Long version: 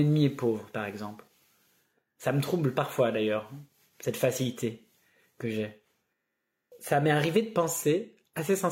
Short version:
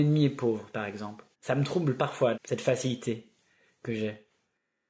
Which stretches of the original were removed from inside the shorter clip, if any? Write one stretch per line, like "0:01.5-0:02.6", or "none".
0:01.3-0:02.1
0:03.1-0:03.9